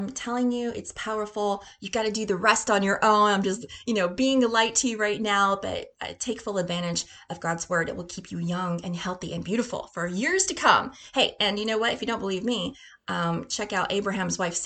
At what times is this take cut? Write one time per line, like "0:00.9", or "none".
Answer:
none

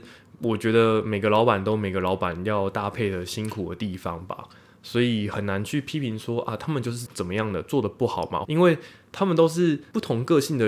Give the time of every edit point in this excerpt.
0:07.1
0:08.4

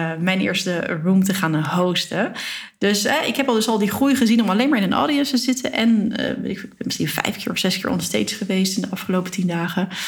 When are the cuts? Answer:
none

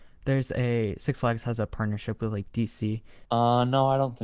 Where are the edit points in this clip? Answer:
0:03.3

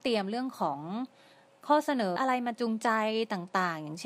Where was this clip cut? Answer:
0:02.2

